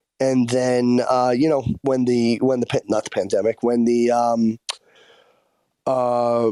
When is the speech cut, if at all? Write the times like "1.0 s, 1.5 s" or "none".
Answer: 2.8 s